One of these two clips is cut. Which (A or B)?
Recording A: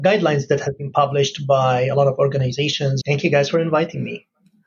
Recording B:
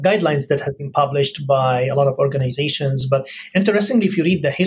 A